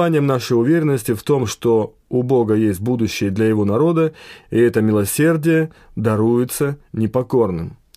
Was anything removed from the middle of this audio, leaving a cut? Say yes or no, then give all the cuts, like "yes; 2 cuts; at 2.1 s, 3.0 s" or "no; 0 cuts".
yes; 1 cut; at 4.4 s